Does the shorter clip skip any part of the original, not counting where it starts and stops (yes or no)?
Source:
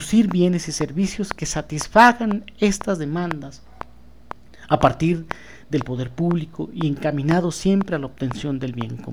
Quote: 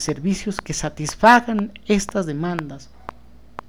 no